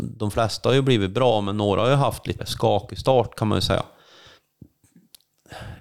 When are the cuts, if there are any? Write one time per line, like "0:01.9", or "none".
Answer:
0:02.4